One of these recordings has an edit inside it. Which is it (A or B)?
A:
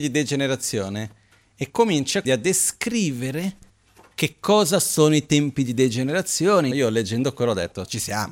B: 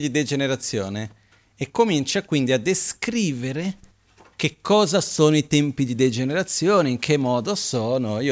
A